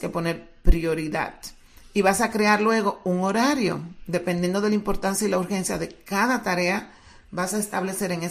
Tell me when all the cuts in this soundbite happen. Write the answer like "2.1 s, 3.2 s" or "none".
none